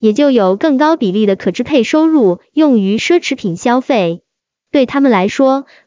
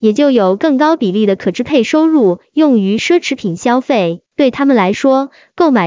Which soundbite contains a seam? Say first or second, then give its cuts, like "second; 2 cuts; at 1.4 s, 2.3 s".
second; 1 cut; at 4.3 s